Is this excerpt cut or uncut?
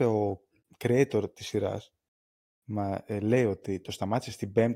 uncut